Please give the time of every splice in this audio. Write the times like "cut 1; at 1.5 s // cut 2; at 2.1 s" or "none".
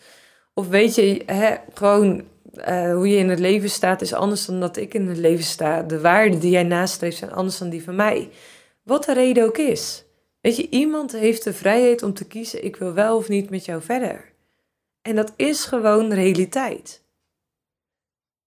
none

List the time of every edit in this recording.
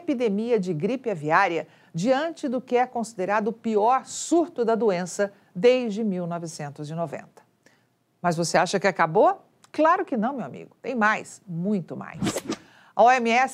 none

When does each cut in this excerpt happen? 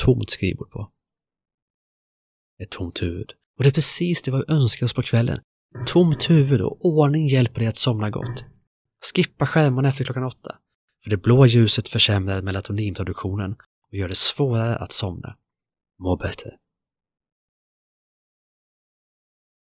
cut 1; at 15.9 s

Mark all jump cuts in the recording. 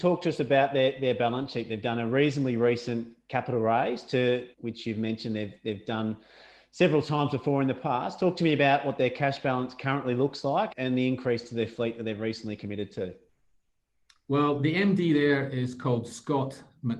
cut 1; at 4.5 s // cut 2; at 10.7 s

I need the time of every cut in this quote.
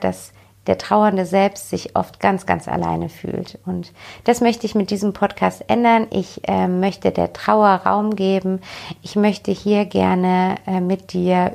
none

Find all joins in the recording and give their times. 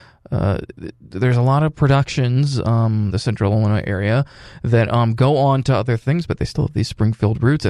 cut 1; at 3.1 s

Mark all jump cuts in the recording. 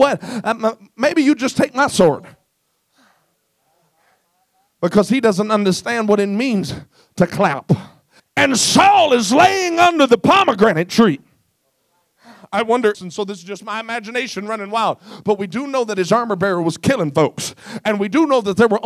cut 1; at 8.2 s // cut 2; at 12.9 s

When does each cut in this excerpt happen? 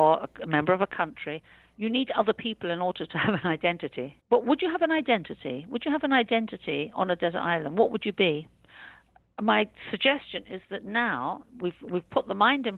cut 1; at 4.2 s

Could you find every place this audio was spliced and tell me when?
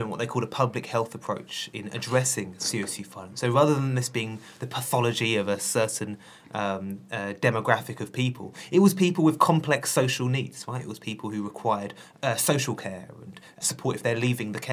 none

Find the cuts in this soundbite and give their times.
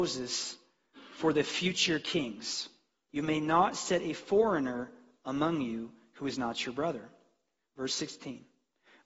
cut 1; at 3.1 s

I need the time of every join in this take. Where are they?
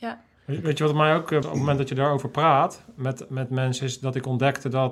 cut 1; at 1.4 s

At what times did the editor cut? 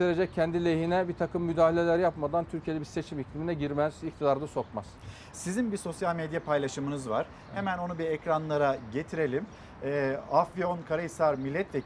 cut 1; at 5.3 s

